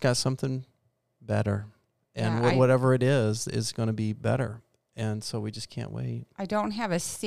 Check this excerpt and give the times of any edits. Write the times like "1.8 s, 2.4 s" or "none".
none